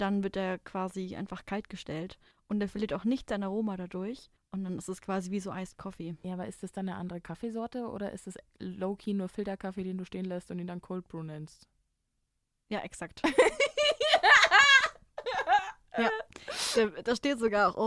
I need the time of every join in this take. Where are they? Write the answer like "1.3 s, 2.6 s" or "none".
none